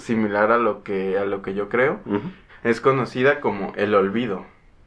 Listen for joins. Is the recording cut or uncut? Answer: cut